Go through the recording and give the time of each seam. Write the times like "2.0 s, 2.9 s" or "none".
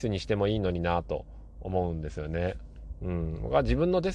none